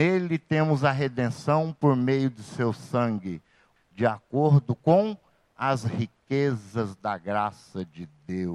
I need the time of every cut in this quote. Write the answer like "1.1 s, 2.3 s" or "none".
3.8 s